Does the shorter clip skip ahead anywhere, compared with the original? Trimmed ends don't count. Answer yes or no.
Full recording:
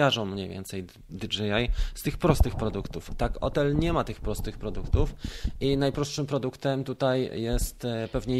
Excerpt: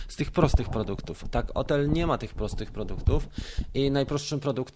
no